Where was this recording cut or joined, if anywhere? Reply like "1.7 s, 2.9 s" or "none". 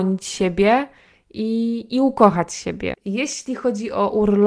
2.9 s